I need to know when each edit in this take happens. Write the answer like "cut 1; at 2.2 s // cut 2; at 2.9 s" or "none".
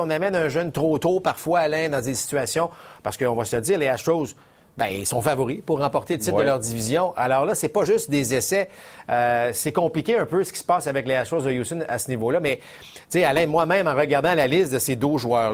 none